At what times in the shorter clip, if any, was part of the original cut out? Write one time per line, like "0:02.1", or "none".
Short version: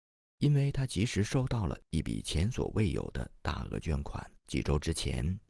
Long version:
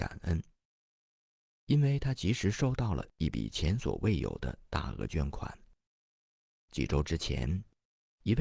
0:04.4